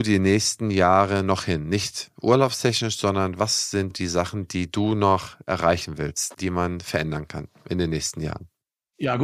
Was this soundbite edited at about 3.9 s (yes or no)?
yes